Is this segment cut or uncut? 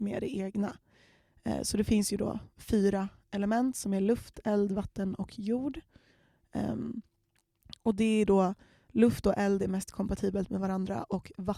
uncut